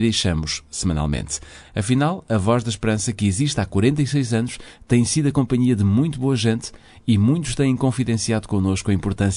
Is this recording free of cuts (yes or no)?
no